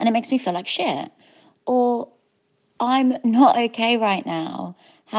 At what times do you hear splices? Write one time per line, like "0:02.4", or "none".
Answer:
none